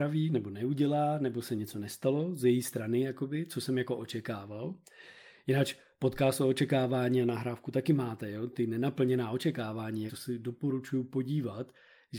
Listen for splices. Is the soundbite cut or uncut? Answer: cut